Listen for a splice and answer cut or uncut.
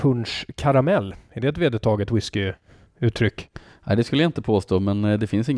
uncut